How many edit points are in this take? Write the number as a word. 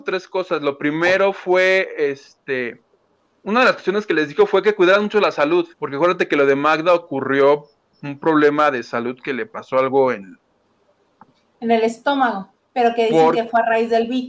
two